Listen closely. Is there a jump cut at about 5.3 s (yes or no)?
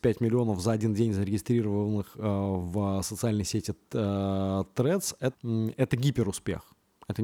yes